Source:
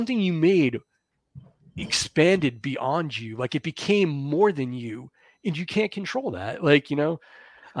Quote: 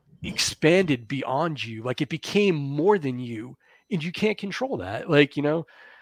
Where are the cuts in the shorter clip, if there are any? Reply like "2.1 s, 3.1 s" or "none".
none